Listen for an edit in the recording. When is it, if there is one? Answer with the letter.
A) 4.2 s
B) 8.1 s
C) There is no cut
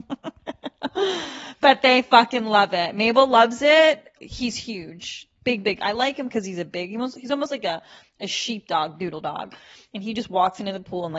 A